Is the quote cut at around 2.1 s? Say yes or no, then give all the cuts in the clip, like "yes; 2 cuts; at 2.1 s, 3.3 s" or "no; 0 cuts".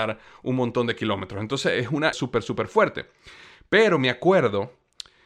yes; 1 cut; at 2.1 s